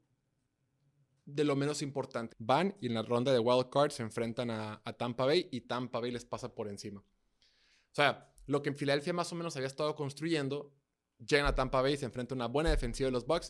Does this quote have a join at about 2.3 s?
yes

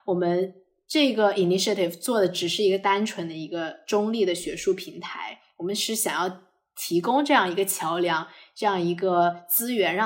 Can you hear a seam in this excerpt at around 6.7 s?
no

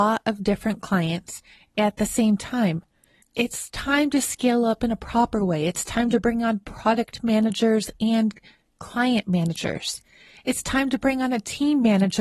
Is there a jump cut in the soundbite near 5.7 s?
no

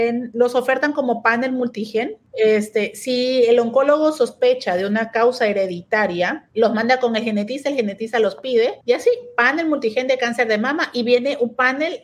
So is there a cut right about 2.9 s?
no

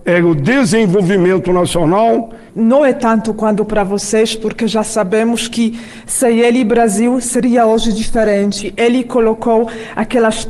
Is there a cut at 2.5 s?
yes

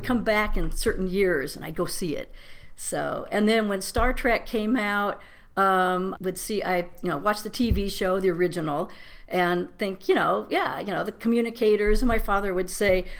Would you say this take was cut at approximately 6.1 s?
yes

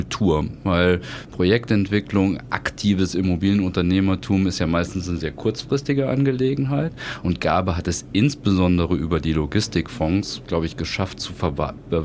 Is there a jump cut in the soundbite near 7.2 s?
yes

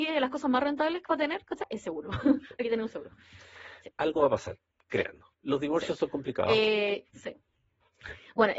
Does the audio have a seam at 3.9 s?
yes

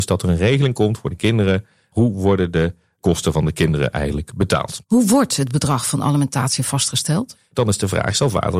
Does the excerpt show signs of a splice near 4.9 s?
no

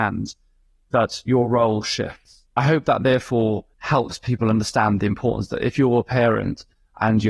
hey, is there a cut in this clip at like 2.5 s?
no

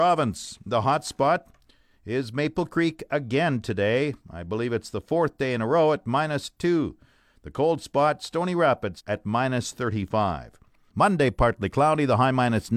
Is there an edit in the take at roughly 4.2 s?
no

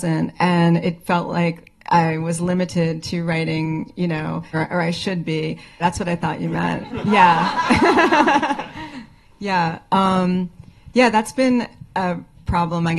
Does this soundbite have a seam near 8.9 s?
yes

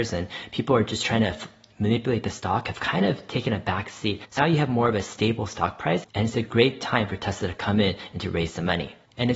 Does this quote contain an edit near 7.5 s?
no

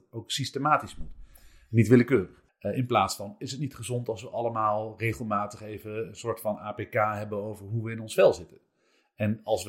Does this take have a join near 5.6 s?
no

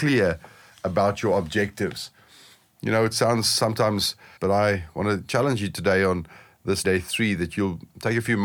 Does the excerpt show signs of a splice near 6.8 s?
yes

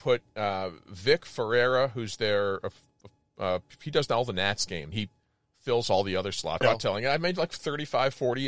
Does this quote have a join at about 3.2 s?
no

